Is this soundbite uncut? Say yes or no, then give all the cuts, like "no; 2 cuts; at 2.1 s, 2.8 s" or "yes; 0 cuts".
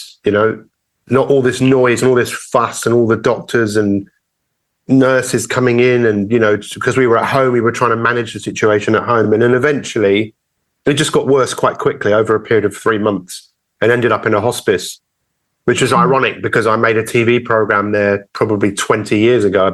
yes; 0 cuts